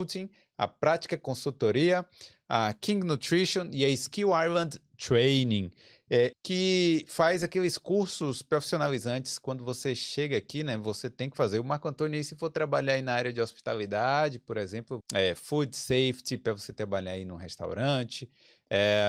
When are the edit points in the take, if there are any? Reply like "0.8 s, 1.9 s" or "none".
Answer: 6.3 s, 15.0 s